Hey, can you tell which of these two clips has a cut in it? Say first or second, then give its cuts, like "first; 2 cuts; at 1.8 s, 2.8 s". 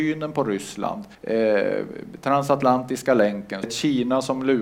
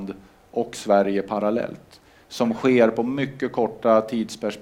first; 2 cuts; at 1.1 s, 3.6 s